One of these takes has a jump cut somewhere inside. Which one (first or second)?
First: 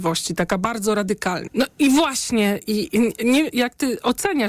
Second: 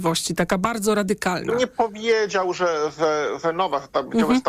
first